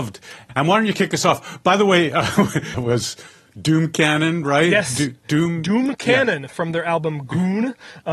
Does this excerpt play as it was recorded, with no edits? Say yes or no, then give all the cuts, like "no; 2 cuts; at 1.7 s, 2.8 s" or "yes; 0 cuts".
no; 1 cut; at 2.7 s